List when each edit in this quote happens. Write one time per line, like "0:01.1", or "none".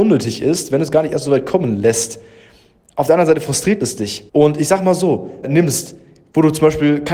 0:04.3
0:05.4